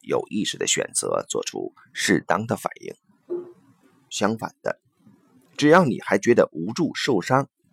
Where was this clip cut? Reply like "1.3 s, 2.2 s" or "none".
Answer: 4.1 s